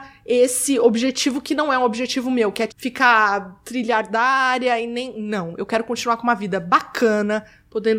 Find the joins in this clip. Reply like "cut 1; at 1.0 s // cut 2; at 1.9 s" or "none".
cut 1; at 2.7 s

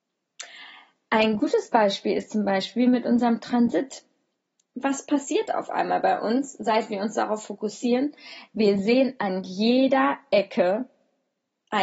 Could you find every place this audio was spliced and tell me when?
none

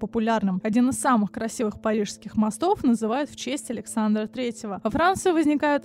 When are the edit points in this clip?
none

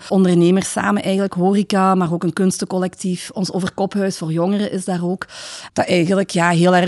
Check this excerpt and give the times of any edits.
cut 1; at 5.7 s

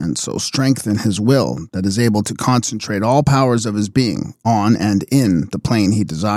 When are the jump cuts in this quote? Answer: none

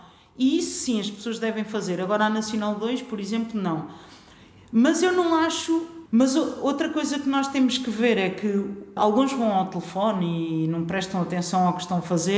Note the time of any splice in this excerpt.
cut 1; at 6.1 s // cut 2; at 9.0 s

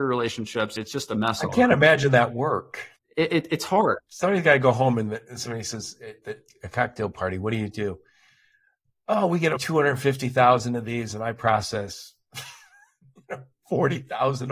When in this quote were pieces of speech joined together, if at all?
cut 1; at 3.0 s

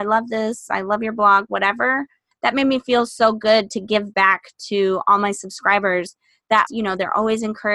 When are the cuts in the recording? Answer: cut 1; at 2.3 s // cut 2; at 6.7 s

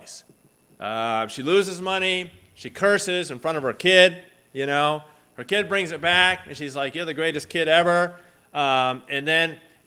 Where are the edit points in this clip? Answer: none

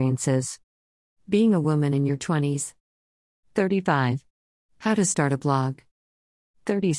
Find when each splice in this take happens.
cut 1; at 1.1 s

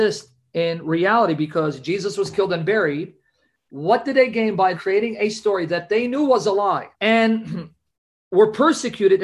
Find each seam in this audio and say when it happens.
cut 1; at 4.7 s // cut 2; at 6.9 s

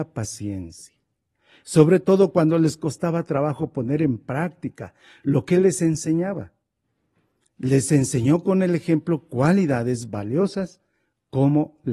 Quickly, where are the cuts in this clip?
cut 1; at 7.5 s

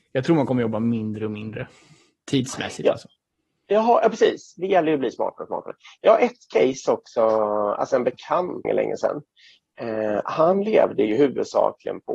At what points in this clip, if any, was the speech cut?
cut 1; at 8.6 s

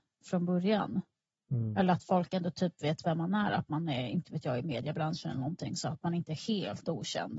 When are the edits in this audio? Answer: none

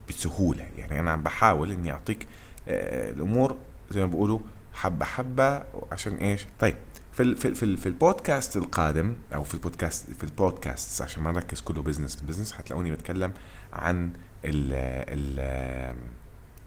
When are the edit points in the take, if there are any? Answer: cut 1; at 6.5 s // cut 2; at 12.2 s

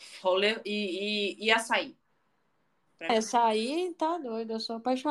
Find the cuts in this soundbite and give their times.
cut 1; at 3.1 s

